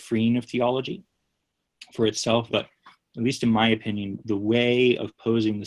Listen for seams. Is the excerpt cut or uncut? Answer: cut